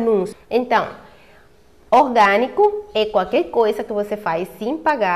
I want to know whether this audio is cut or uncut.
uncut